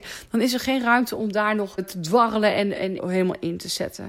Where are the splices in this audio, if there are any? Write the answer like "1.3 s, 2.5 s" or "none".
1.8 s, 3.0 s